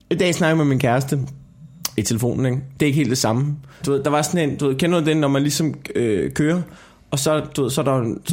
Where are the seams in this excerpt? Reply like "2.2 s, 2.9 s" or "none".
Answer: 3.8 s